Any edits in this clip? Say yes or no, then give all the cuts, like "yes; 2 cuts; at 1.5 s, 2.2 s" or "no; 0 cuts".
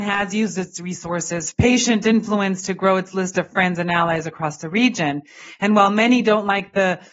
yes; 1 cut; at 1.5 s